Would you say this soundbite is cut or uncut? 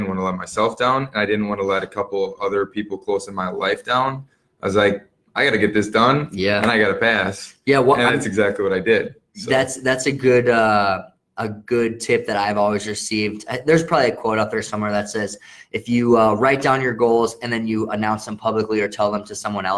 uncut